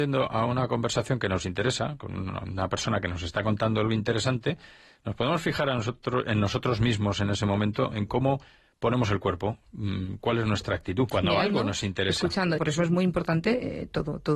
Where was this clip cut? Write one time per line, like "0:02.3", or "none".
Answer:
0:11.1
0:12.6